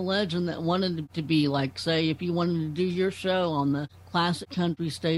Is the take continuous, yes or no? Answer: yes